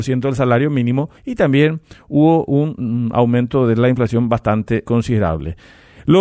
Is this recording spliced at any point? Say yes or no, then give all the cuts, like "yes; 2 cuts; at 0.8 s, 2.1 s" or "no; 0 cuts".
yes; 2 cuts; at 1.2 s, 4.8 s